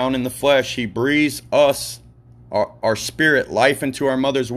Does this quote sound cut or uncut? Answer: uncut